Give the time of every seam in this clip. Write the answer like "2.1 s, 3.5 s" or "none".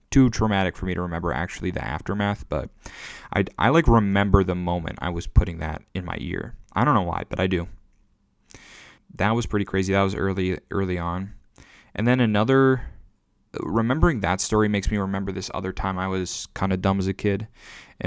9.0 s